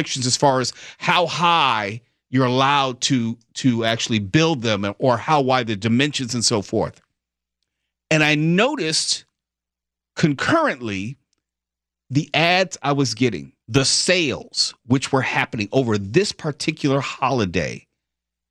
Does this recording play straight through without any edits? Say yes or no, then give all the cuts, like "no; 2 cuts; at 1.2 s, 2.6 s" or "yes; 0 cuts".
no; 1 cut; at 13.6 s